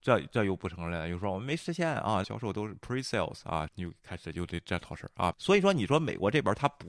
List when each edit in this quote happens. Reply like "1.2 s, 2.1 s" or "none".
2.2 s, 3.7 s, 5.3 s